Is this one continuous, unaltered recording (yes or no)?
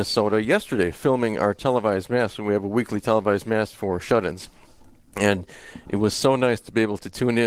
yes